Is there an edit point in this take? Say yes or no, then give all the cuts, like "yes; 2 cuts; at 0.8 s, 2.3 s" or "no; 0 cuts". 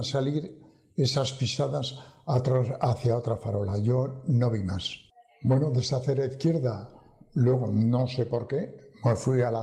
no; 0 cuts